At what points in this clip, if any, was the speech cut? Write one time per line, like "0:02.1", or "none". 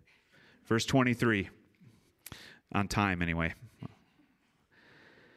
none